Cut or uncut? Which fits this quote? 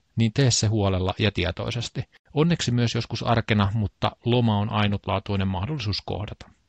cut